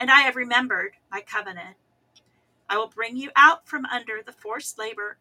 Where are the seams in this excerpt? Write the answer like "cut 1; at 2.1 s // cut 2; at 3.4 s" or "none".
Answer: cut 1; at 2.6 s